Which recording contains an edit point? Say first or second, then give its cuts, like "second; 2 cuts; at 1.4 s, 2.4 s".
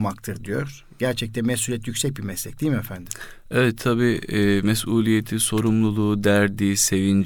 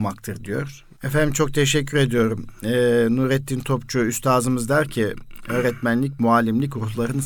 second; 1 cut; at 1.0 s